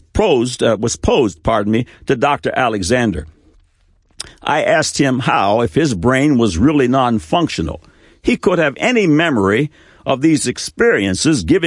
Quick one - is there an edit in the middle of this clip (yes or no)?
no